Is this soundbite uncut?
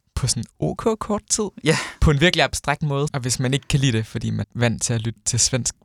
no; 3 cuts; at 1.6 s, 3.1 s, 4.4 s

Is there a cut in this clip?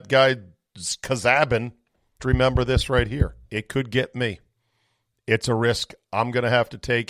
yes; 2 cuts; at 2.2 s, 3.4 s

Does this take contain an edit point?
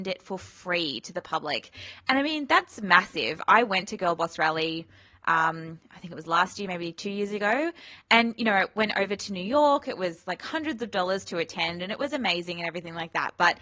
no; 0 cuts

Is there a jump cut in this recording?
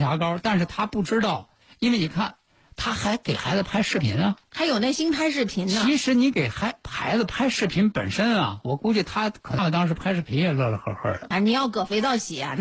yes; 2 cuts; at 9.6 s, 11.3 s

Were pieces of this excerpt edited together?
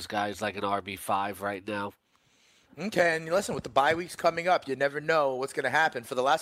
no; 0 cuts

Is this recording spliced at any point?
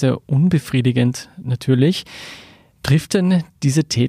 no; 0 cuts

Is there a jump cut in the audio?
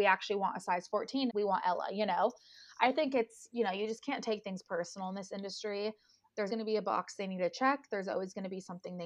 yes; 2 cuts; at 1.3 s, 6.5 s

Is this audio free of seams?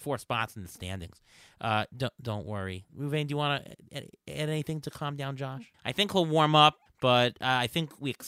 no; 2 cuts; at 5.7 s, 6.9 s

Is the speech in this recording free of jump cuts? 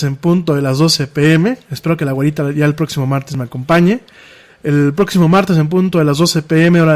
yes; 0 cuts

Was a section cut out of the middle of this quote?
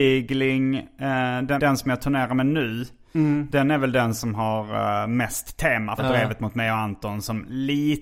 yes; 2 cuts; at 1.6 s, 6.0 s

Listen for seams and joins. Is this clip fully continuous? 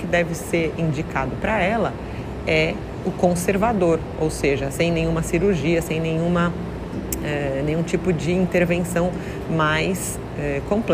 yes; 0 cuts

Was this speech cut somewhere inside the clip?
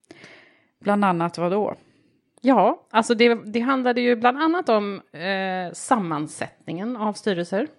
no; 0 cuts

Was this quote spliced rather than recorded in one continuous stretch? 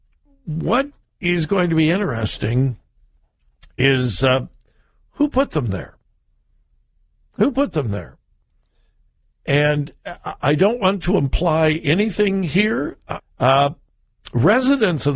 yes; 1 cut; at 13.2 s

